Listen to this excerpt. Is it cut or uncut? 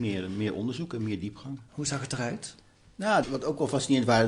cut